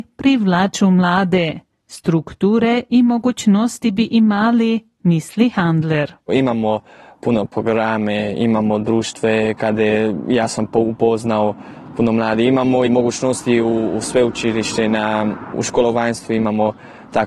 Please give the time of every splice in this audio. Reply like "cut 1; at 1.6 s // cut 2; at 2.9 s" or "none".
cut 1; at 12.9 s